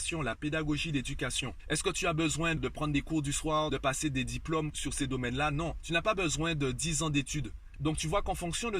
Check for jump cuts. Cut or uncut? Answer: cut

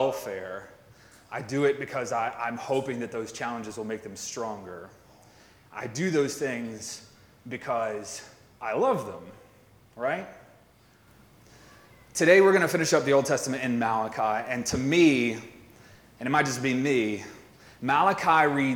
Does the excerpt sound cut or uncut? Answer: uncut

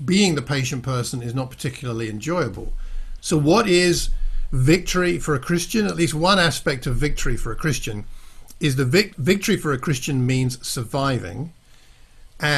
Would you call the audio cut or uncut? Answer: cut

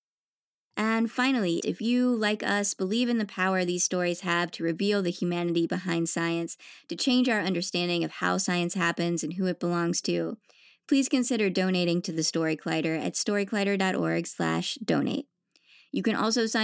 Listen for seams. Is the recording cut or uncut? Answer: cut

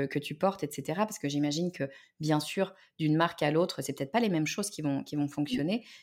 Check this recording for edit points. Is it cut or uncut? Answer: uncut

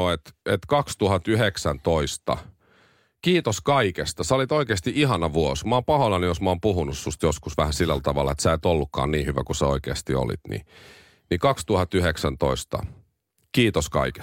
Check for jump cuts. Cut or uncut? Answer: uncut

